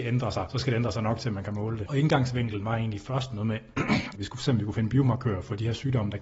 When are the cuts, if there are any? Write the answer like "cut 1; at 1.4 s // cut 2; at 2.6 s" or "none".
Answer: cut 1; at 1.9 s // cut 2; at 4.1 s

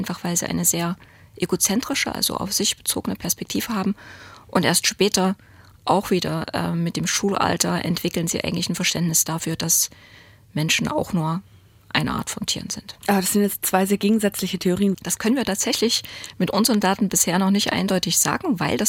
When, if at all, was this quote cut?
cut 1; at 14.9 s

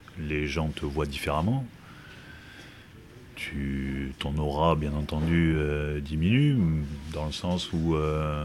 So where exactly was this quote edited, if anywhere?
none

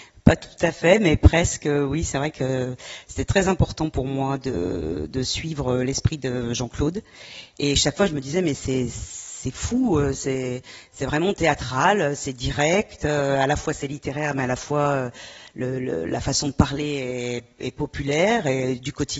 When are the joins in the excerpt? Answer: cut 1; at 7.5 s

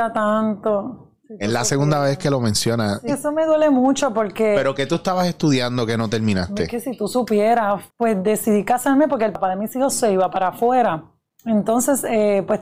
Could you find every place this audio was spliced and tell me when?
cut 1; at 3.1 s // cut 2; at 7.9 s

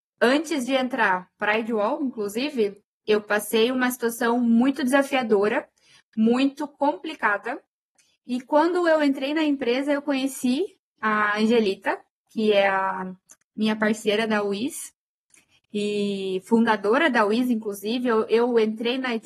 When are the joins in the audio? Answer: none

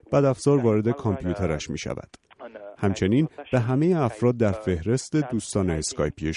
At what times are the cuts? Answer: cut 1; at 2.8 s

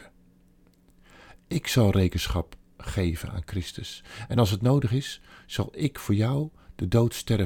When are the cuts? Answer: none

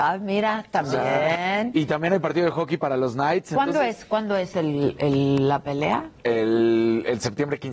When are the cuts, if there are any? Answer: none

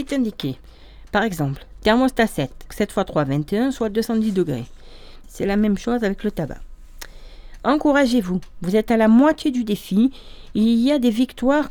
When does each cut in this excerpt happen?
cut 1; at 2.7 s // cut 2; at 5.2 s

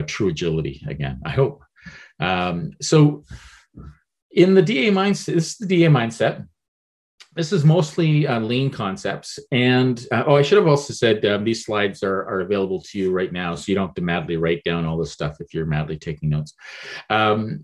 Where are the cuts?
none

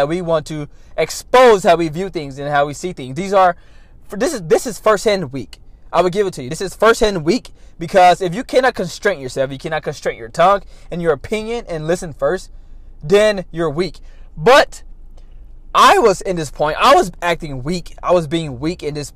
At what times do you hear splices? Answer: none

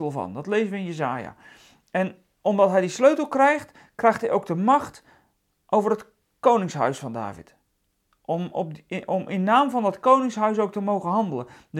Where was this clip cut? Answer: none

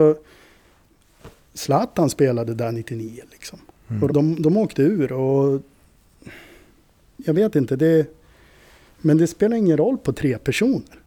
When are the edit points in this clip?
cut 1; at 4.1 s // cut 2; at 8.9 s

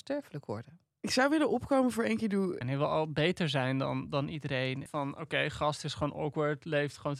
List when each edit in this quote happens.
cut 1; at 2.6 s // cut 2; at 4.9 s

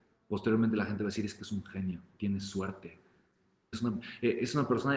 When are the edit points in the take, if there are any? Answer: cut 1; at 3.7 s

